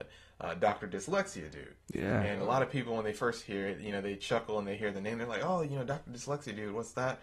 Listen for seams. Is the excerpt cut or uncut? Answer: uncut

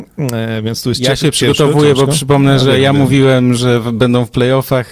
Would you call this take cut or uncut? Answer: uncut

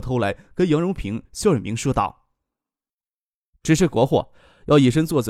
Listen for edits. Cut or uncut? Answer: uncut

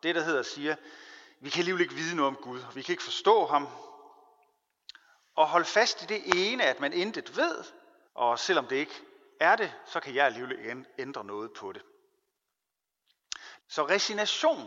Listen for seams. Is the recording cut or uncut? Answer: cut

